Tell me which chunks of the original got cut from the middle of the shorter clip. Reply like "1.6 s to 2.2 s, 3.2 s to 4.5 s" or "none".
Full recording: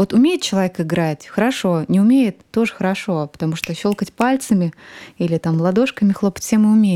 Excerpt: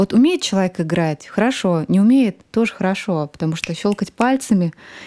none